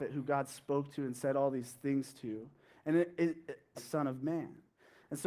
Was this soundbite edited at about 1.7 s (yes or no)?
no